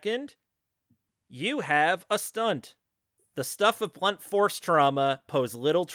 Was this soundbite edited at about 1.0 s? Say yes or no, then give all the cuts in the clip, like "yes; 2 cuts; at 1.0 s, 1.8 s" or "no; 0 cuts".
no; 1 cut; at 3.2 s